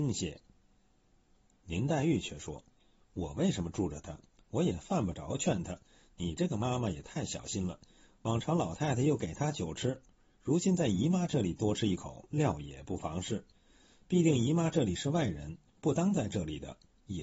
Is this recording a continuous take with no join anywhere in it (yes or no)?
yes